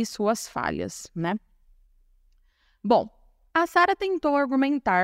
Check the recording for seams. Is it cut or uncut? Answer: uncut